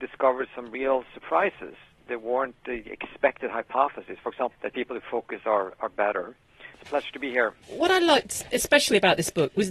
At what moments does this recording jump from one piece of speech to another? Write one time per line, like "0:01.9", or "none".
0:04.5
0:06.7